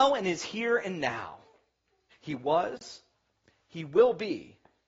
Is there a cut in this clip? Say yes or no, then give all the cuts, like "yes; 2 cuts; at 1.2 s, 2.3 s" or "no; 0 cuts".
yes; 1 cut; at 2.1 s